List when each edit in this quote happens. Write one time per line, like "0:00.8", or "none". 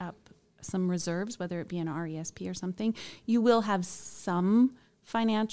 none